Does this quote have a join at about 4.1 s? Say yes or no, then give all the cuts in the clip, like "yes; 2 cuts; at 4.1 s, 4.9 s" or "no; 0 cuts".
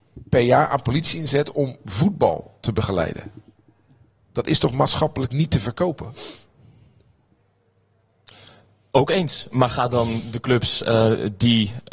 no; 0 cuts